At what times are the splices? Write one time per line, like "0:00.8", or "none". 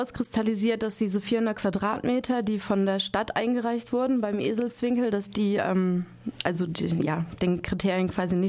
none